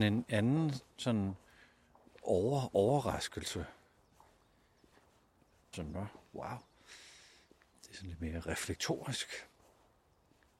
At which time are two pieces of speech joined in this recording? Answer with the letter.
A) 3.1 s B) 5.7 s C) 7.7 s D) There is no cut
B